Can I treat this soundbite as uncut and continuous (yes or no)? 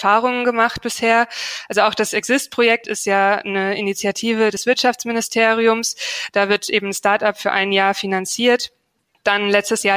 no